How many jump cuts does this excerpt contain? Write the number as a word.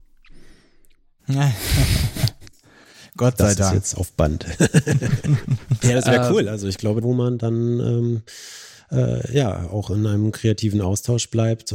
two